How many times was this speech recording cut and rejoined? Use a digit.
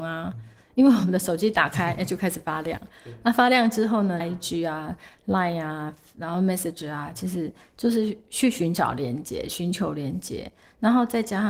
1